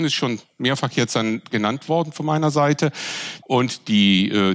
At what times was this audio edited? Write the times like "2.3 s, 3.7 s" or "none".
3.4 s